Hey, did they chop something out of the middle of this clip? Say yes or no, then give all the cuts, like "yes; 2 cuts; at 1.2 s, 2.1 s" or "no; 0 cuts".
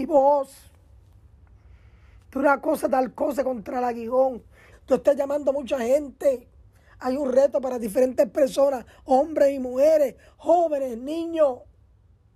yes; 1 cut; at 4.7 s